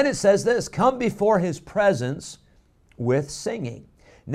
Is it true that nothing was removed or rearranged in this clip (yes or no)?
yes